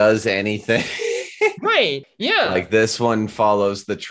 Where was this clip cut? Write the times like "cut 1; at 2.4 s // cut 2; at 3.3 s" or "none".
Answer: cut 1; at 2.0 s